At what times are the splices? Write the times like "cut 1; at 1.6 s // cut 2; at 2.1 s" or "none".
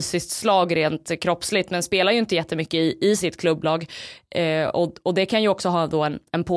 none